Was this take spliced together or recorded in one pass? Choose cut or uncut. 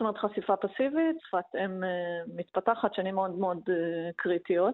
cut